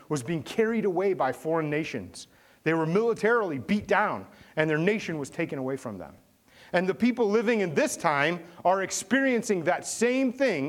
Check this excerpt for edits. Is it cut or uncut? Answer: uncut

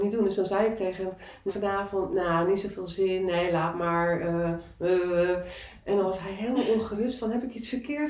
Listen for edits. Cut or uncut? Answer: cut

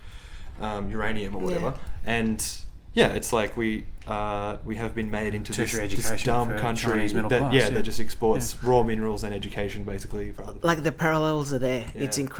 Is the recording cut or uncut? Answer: uncut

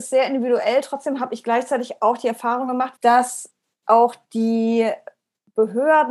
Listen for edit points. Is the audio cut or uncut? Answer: cut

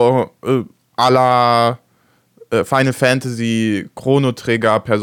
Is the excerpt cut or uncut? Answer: uncut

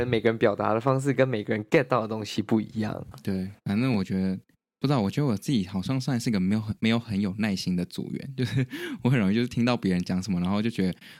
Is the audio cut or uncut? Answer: cut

